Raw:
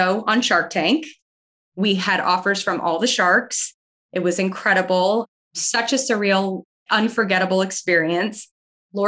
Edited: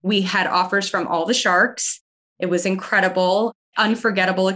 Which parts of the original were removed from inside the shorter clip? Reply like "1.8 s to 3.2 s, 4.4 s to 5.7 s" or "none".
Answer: 5.4 s to 6.8 s